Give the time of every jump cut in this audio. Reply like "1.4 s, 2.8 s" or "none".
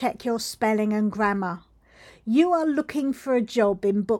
none